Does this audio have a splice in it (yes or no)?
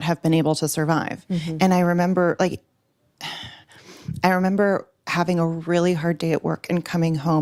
no